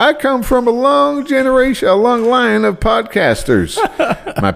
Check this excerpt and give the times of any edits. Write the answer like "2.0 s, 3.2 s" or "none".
none